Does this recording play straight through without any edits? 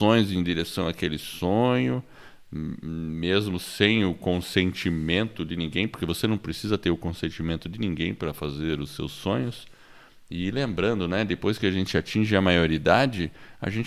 yes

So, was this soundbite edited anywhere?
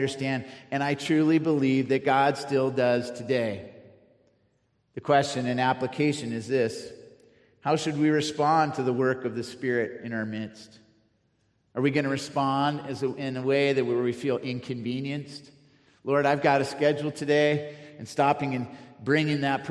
no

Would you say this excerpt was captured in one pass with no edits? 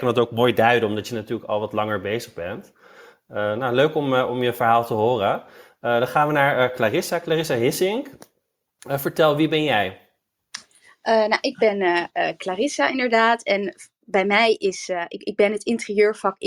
yes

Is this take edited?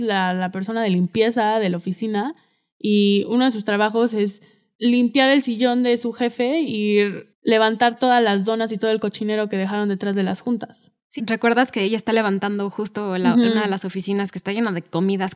yes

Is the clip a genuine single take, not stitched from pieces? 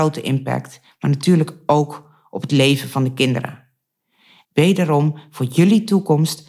no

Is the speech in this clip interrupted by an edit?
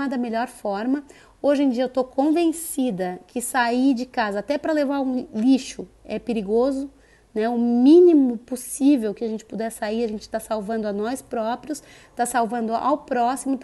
no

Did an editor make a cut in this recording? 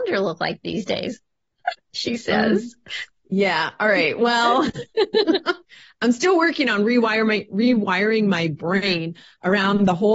no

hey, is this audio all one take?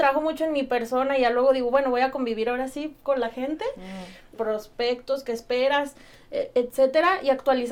no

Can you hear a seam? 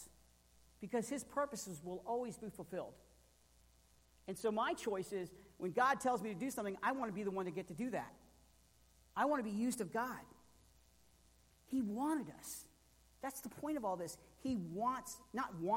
no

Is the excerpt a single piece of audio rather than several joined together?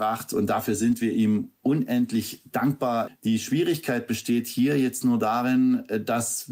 no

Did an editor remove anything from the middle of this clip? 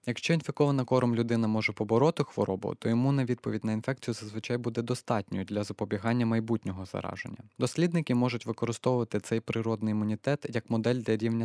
no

